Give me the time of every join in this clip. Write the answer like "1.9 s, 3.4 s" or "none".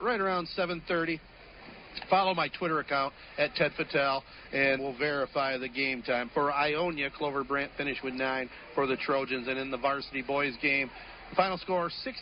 4.8 s, 6.3 s